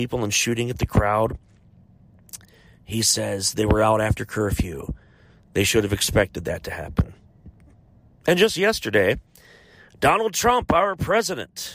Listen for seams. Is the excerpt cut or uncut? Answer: uncut